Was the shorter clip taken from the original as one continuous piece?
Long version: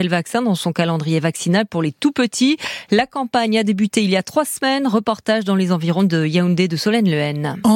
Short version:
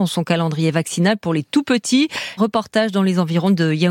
no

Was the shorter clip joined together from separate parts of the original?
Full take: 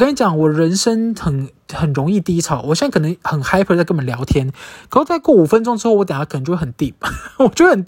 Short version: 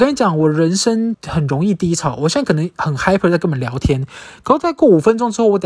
yes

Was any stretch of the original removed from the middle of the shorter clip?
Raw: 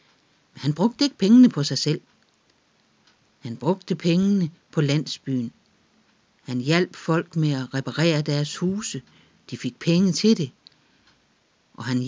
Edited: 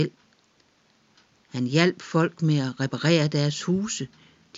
yes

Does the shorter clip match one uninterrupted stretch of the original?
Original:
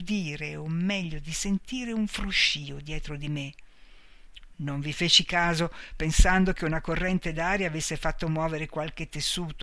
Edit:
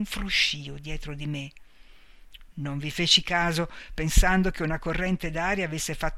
yes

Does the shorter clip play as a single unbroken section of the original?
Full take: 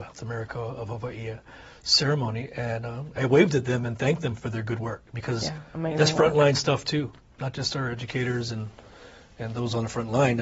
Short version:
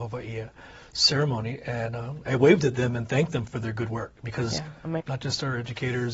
no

